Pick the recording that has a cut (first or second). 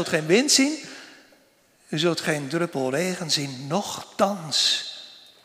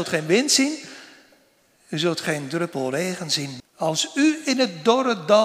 second